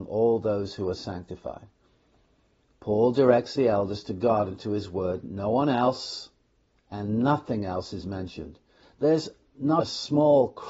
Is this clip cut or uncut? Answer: cut